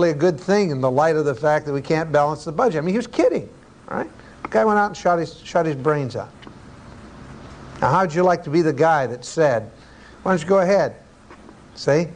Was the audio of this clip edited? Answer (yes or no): no